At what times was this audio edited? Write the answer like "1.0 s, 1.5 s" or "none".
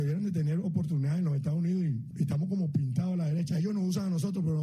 none